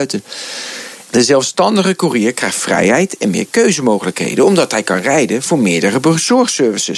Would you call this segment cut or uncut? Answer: cut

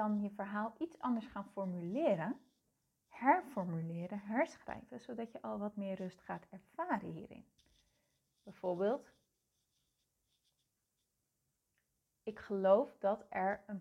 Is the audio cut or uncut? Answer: uncut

